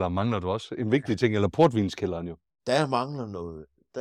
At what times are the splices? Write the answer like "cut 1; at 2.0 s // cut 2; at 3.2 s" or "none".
cut 1; at 2.5 s